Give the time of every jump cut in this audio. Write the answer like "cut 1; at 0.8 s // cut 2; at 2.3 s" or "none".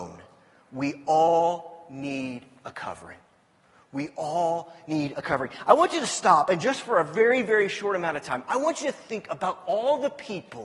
none